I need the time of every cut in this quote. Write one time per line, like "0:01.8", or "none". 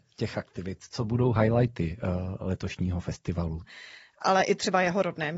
0:03.6